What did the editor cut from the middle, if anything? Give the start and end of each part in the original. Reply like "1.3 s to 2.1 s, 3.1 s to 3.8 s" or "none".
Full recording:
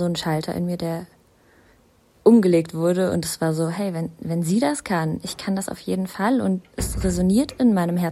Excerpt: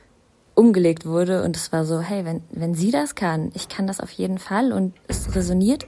none